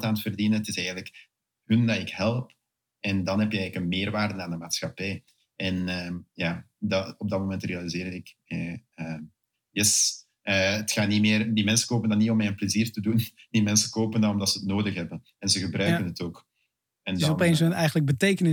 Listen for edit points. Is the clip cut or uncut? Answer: uncut